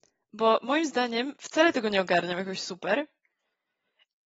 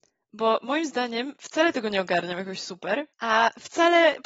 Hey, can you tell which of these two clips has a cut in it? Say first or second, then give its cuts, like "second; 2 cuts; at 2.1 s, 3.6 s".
second; 1 cut; at 3.1 s